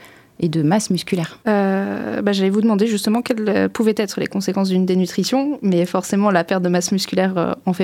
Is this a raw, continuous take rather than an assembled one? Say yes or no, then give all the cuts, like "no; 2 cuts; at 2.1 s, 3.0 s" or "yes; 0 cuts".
no; 1 cut; at 1.4 s